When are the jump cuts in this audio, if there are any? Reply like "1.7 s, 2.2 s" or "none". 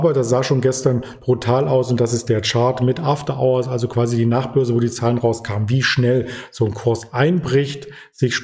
none